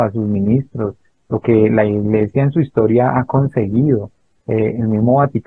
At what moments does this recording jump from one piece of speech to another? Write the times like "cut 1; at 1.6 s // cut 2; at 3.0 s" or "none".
none

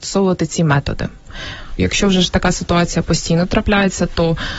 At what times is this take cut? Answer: cut 1; at 1.8 s

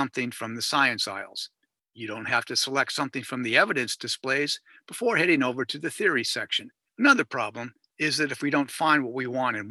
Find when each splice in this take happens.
cut 1; at 6.9 s

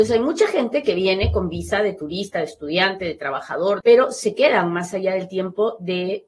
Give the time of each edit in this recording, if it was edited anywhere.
cut 1; at 3.8 s

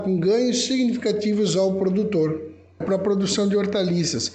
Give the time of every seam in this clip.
cut 1; at 2.8 s

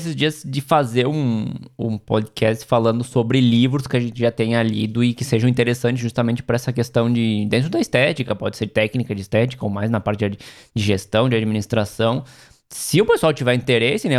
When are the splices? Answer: none

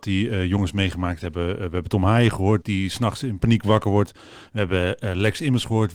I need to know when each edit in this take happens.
cut 1; at 2.6 s

